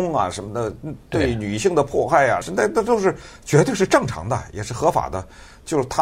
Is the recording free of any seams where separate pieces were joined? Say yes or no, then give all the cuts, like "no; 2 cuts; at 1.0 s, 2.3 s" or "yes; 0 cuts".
no; 1 cut; at 2.4 s